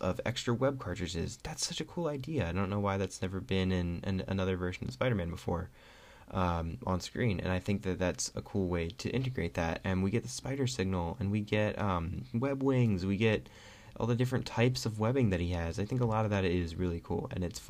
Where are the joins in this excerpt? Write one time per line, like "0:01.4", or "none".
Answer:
none